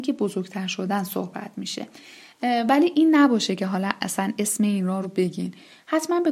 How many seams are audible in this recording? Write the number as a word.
one